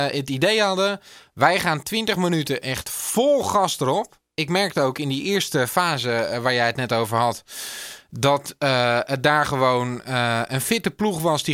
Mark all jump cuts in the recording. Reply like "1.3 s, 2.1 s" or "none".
none